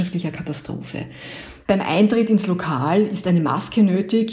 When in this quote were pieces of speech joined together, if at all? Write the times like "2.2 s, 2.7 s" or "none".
1.7 s